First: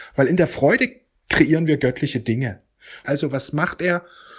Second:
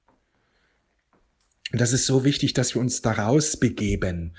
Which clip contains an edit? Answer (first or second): first